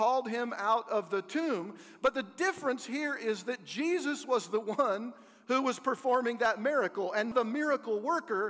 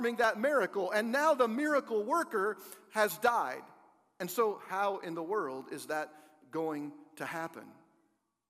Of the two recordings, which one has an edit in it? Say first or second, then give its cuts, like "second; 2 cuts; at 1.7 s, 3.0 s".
first; 1 cut; at 7.3 s